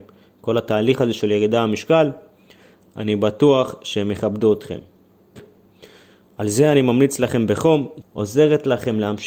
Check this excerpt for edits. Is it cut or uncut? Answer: cut